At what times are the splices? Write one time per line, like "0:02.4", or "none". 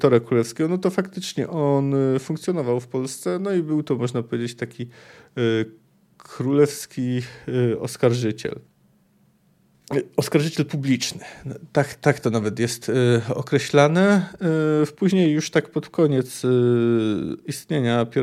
none